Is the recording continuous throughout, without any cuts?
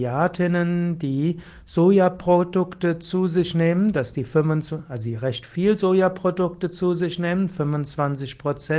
yes; 0 cuts

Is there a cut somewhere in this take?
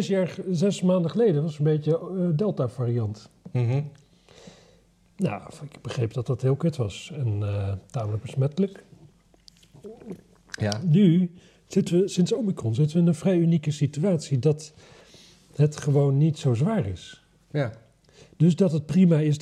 no; 0 cuts

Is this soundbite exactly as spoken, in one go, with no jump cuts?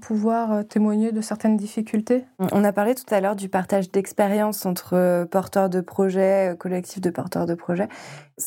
no; 1 cut; at 2.3 s

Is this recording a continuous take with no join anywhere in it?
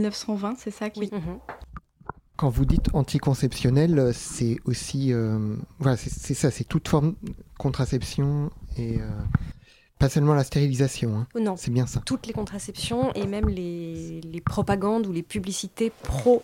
no; 1 cut; at 1.1 s

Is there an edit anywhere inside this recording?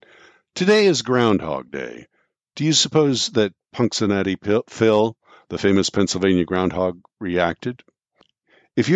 no; 0 cuts

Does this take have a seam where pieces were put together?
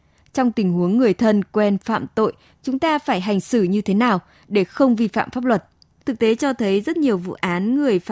yes; 1 cut; at 6.0 s

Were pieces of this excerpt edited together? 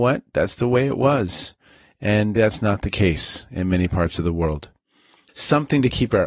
yes; 2 cuts; at 2.4 s, 5.3 s

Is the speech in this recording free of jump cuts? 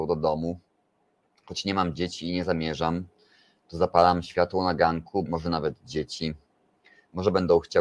no; 1 cut; at 5.3 s

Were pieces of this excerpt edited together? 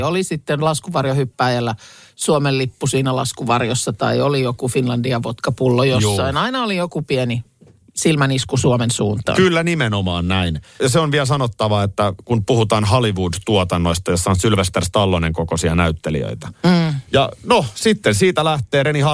yes; 2 cuts; at 10.8 s, 17.1 s

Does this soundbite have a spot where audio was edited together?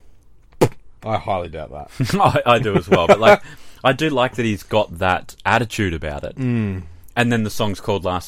no; 0 cuts

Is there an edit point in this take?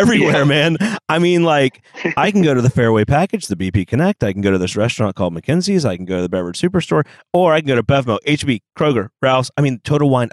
no; 0 cuts

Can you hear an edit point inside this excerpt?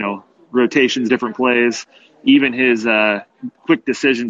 no; 0 cuts

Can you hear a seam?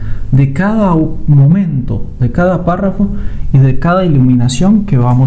yes; 1 cut; at 2.2 s

